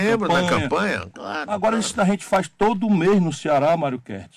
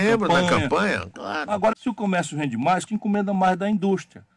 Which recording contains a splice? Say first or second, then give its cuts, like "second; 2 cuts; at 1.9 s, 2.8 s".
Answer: second; 2 cuts; at 1.7 s, 2.9 s